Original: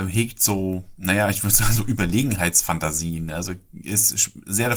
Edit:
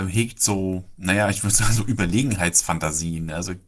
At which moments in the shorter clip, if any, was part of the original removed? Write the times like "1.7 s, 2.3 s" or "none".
none